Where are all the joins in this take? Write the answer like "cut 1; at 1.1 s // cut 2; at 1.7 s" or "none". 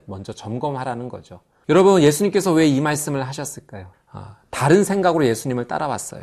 cut 1; at 1.6 s // cut 2; at 3.9 s